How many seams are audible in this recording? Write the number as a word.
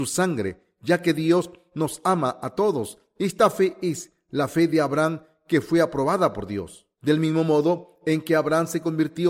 one